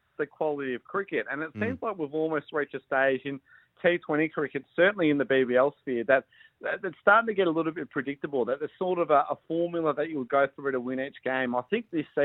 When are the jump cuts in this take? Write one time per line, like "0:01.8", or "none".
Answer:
none